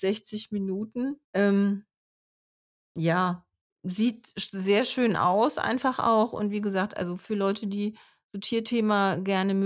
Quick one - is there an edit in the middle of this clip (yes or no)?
yes